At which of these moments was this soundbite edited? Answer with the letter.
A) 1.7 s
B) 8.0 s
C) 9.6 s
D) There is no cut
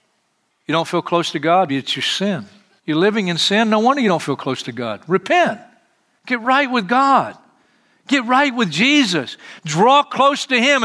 A